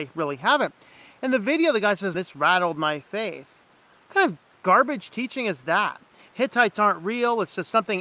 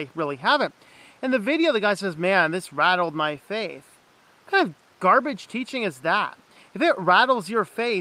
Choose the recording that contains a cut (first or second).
first